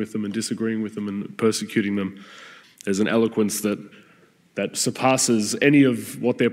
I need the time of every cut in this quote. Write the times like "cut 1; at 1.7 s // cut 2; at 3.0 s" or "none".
cut 1; at 2.6 s